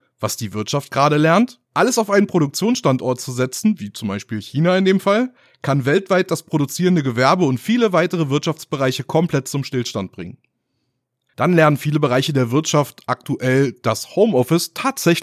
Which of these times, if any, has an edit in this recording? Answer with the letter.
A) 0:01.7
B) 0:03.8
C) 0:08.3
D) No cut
A